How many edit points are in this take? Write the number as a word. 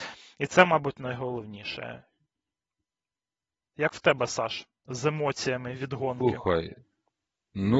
zero